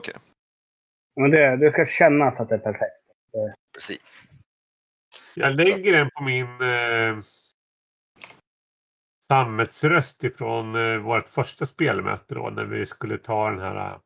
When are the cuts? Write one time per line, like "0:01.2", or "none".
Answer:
0:03.5